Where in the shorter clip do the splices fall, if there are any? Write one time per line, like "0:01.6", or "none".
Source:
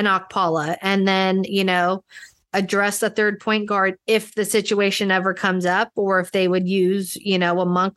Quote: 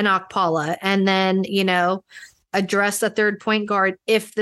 none